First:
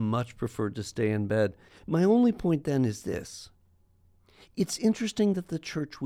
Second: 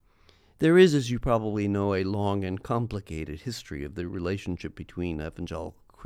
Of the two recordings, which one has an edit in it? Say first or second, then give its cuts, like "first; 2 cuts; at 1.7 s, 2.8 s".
first; 1 cut; at 1.7 s